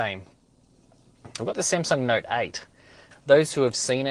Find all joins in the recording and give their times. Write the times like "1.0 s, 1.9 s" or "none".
1.4 s, 3.1 s

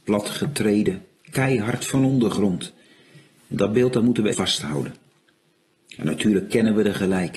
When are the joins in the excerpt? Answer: 4.3 s

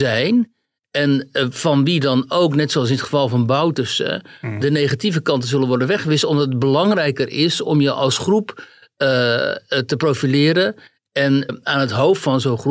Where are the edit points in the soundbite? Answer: 11.5 s

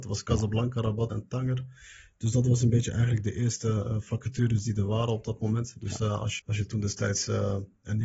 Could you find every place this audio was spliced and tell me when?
1.1 s, 6.4 s

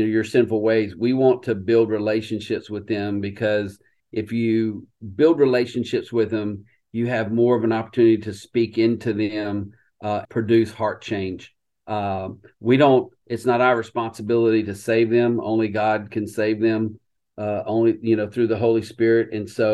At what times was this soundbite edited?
10.2 s

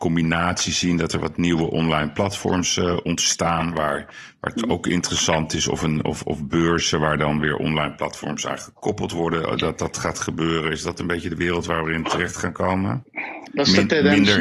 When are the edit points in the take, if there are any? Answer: none

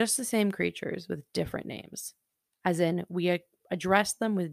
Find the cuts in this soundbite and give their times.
none

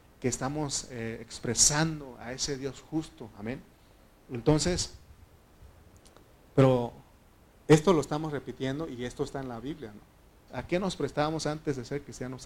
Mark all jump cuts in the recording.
10.5 s

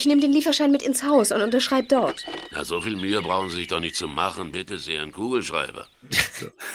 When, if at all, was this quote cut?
none

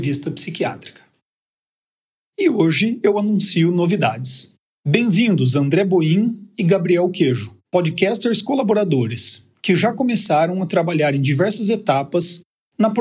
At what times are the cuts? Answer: 2.2 s, 4.7 s, 7.6 s

